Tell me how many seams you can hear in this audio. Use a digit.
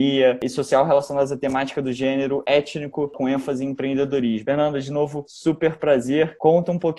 2